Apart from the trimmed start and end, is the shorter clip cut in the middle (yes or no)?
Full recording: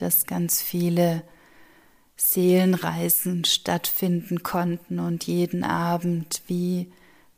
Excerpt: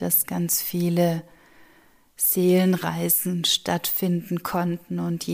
no